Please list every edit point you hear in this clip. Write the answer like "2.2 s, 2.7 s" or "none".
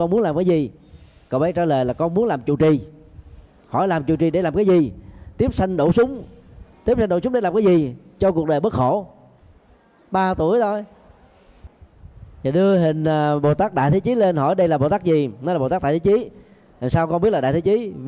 none